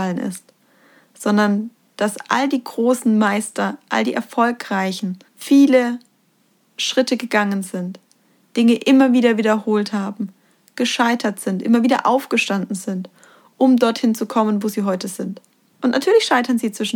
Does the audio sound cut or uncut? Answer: cut